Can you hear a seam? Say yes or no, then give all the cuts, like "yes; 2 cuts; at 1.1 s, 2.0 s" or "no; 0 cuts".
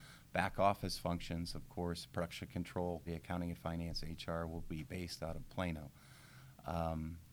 yes; 1 cut; at 3.1 s